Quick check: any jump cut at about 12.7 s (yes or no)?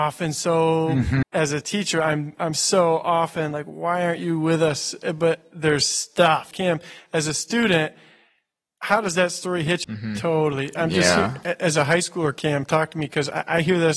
no